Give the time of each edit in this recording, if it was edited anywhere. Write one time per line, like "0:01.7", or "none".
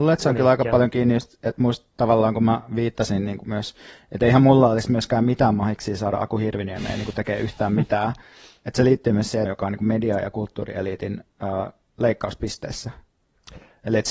0:09.4